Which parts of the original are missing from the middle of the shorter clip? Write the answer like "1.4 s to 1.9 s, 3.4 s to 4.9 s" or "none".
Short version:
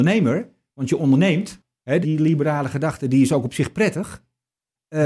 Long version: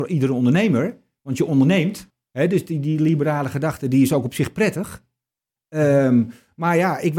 2.5 s to 2.8 s